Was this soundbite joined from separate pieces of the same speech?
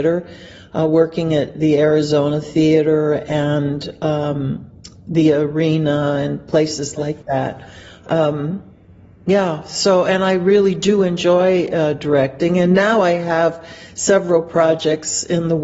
no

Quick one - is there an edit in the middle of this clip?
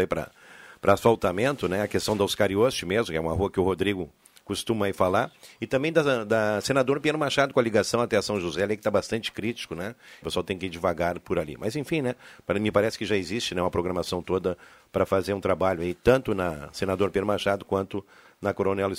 yes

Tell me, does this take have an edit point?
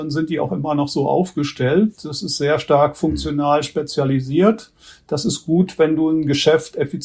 no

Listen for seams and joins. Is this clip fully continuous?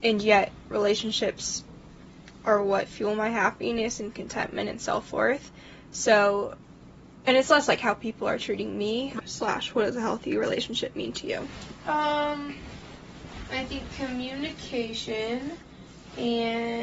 no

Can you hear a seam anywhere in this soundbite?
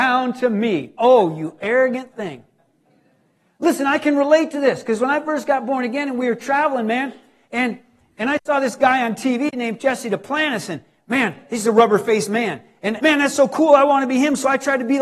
yes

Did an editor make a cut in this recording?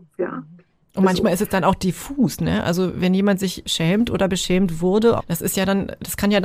yes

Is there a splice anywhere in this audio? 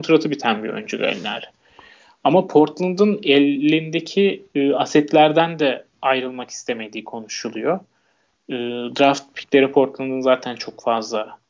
no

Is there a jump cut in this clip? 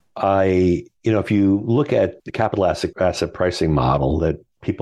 yes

